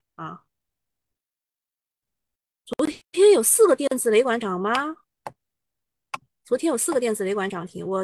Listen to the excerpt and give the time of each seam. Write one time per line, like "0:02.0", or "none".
none